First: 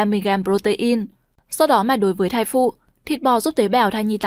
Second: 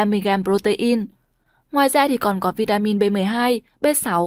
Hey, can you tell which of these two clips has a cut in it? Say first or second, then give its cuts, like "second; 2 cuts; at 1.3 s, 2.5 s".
first; 1 cut; at 1.4 s